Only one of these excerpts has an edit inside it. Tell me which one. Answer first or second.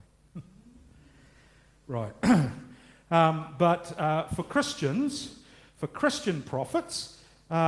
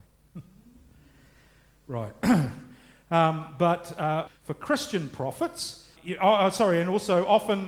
second